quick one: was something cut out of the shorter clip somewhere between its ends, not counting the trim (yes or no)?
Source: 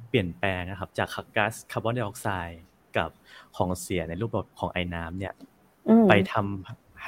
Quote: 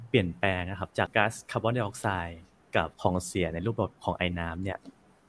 yes